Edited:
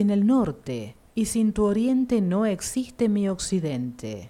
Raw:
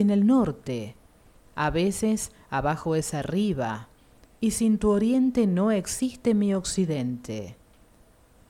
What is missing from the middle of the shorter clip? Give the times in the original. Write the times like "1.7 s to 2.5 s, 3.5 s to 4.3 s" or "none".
1.1 s to 4.3 s